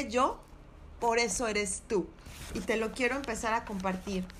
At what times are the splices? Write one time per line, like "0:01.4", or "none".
0:00.9